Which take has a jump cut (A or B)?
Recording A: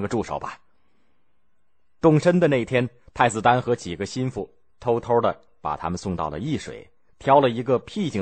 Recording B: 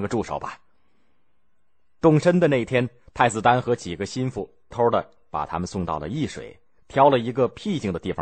B